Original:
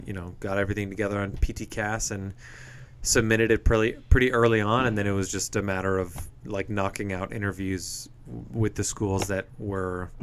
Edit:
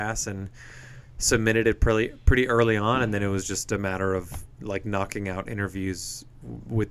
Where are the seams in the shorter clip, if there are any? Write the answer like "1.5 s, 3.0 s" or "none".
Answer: none